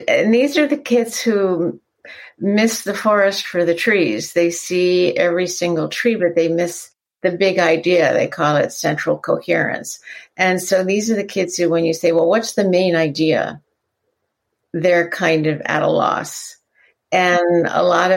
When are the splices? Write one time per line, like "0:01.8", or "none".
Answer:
none